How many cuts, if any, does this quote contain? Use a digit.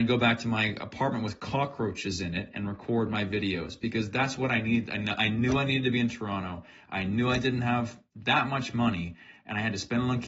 0